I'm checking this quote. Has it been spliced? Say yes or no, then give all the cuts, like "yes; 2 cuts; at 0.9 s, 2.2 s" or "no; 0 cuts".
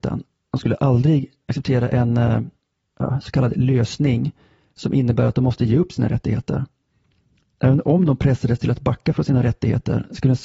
no; 0 cuts